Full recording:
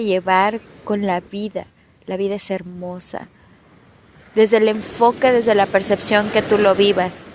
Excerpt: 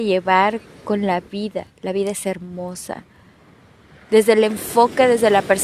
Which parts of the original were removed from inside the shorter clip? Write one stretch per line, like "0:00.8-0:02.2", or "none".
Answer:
0:01.7-0:02.0